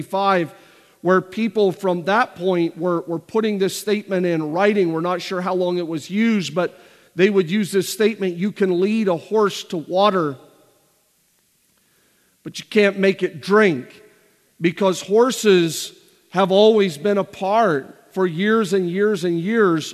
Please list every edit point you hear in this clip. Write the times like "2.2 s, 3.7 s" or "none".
none